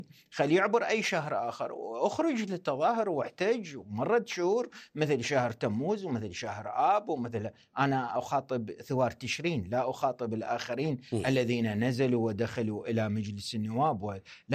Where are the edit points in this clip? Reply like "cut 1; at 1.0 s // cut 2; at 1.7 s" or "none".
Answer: none